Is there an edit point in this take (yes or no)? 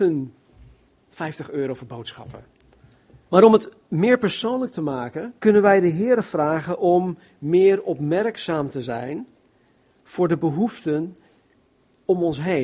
yes